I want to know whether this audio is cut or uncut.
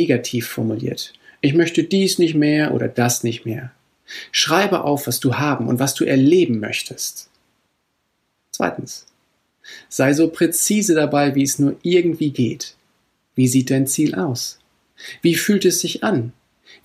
uncut